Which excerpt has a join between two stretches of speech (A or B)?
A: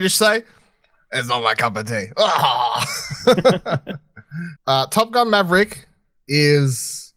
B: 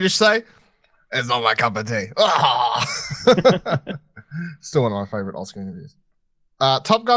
A